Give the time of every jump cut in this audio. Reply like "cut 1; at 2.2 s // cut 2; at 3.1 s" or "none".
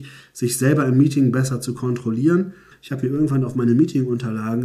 cut 1; at 2.7 s